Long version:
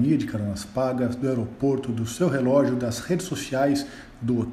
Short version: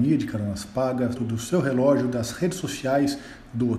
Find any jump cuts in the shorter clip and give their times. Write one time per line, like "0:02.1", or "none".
0:01.2

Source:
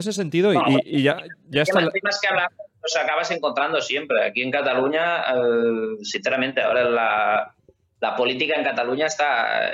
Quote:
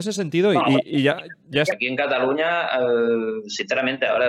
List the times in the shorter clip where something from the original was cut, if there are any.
0:01.7

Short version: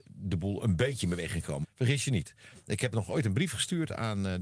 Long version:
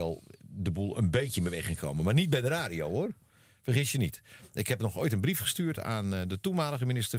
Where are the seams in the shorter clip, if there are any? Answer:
0:01.6

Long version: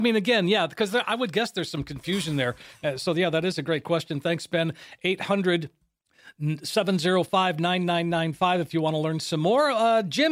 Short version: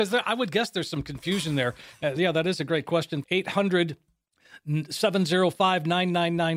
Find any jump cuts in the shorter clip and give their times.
0:02.2
0:03.2

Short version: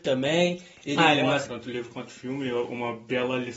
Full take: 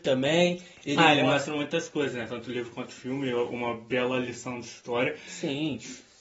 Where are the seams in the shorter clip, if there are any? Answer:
0:01.5

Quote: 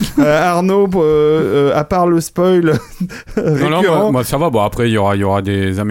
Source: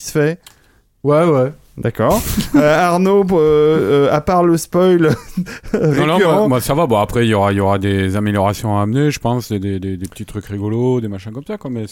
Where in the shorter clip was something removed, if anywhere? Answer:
none

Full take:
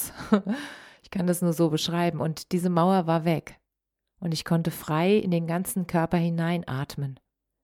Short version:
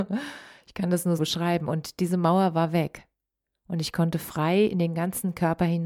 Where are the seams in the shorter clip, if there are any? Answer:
0:01.2

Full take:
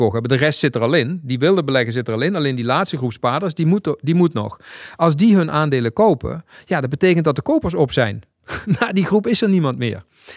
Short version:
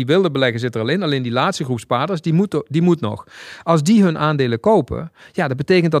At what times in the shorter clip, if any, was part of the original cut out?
none

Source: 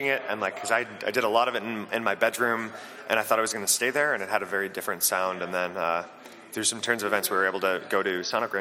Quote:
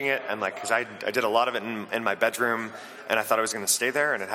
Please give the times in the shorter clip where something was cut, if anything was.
none

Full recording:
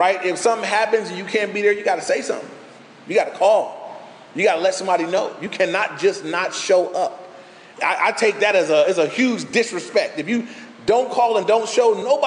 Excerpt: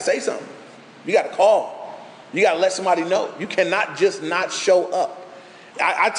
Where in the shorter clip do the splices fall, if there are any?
none

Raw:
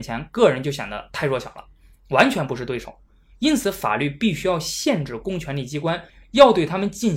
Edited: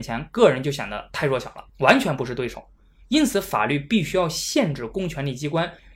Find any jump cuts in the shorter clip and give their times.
0:01.7

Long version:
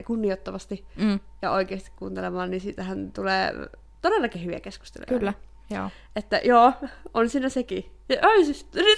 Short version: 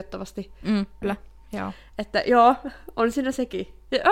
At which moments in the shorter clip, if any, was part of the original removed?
0:01.0

